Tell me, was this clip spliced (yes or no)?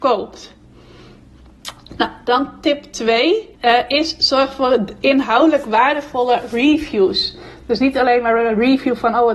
yes